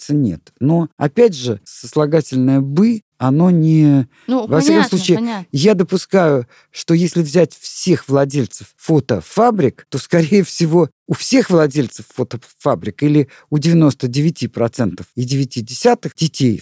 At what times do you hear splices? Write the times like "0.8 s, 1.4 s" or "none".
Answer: none